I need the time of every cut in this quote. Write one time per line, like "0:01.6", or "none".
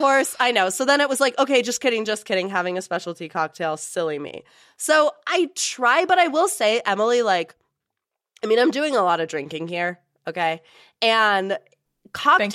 none